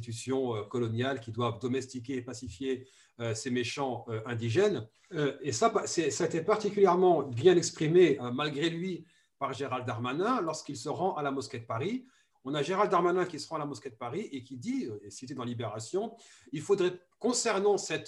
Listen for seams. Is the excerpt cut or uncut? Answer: cut